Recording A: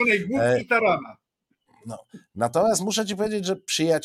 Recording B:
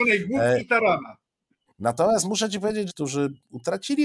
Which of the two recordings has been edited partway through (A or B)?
B